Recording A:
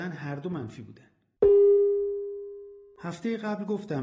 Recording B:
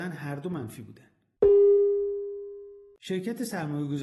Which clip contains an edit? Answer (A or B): A